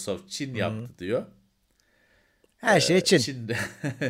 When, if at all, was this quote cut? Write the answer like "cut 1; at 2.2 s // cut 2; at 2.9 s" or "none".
none